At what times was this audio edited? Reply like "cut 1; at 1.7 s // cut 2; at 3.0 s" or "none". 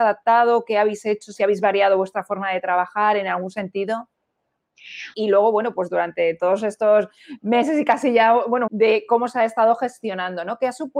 cut 1; at 5.1 s // cut 2; at 8.7 s